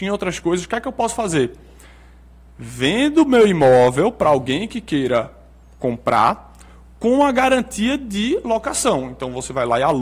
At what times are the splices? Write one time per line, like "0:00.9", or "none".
none